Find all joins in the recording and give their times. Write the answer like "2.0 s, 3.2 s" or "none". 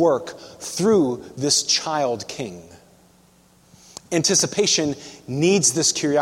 none